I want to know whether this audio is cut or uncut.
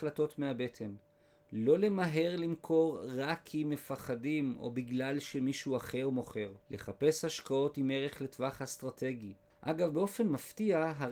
cut